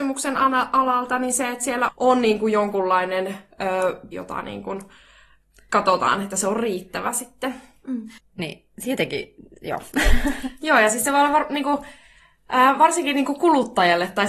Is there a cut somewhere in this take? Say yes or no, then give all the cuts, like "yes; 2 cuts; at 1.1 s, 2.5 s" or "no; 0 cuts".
yes; 3 cuts; at 1.9 s, 4.1 s, 8.2 s